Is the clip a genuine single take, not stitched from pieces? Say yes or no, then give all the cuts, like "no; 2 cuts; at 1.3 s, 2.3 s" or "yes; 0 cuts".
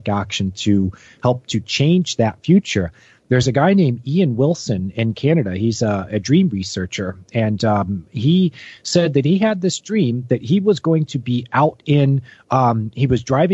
yes; 0 cuts